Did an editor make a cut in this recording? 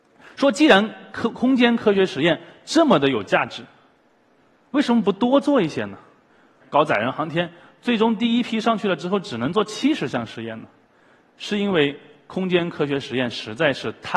yes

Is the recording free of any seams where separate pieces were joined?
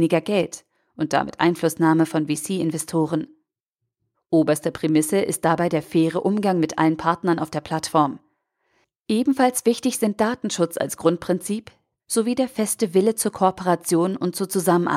no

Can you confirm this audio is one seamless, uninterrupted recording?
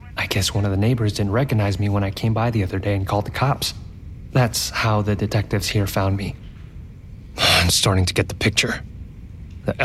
yes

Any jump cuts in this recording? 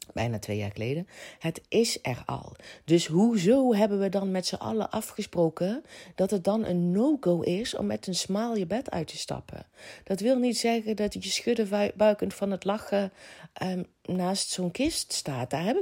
no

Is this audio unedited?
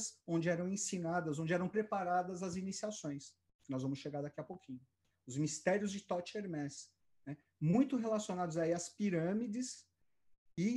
yes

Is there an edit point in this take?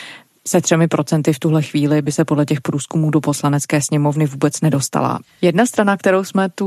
yes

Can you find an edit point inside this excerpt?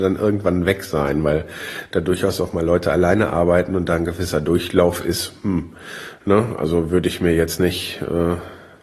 no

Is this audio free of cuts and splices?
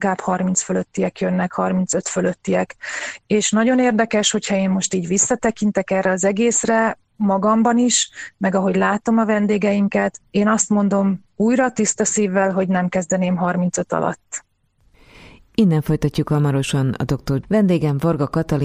no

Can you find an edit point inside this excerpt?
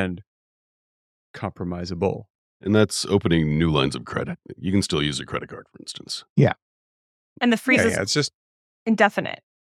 no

